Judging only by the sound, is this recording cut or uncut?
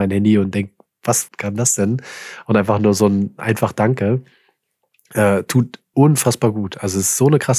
cut